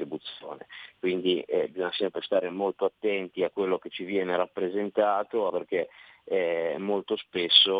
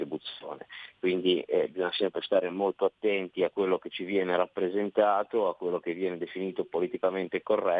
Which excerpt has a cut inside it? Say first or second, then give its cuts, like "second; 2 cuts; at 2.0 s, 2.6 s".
first; 1 cut; at 5.5 s